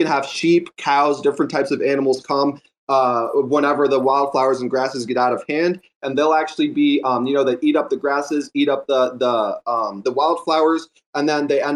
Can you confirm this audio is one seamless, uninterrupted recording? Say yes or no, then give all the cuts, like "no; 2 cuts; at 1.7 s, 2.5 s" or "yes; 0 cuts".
yes; 0 cuts